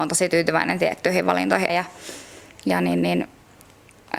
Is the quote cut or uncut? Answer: cut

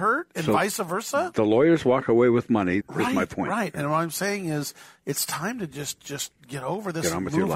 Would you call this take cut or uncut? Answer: cut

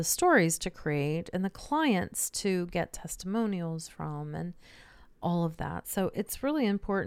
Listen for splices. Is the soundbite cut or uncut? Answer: uncut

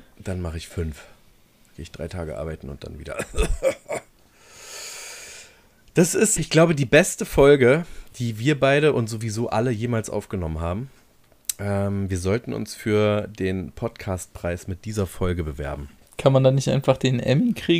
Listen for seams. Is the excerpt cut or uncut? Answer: cut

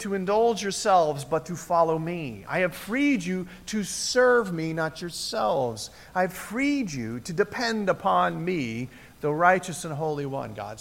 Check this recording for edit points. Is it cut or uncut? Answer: uncut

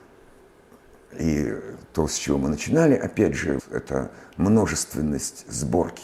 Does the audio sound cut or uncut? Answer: cut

